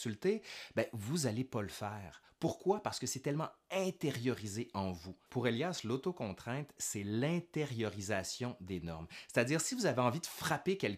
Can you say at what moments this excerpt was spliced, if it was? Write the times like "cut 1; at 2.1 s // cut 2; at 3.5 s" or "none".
cut 1; at 5.3 s